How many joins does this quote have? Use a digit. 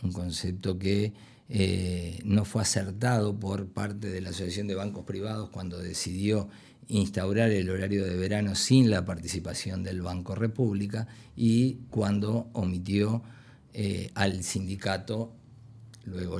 1